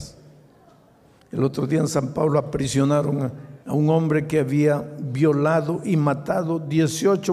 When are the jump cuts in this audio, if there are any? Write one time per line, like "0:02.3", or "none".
0:01.2
0:03.6